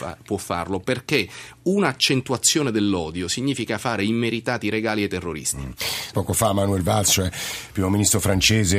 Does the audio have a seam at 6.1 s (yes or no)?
yes